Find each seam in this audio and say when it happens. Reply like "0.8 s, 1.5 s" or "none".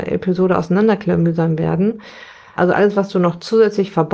2.6 s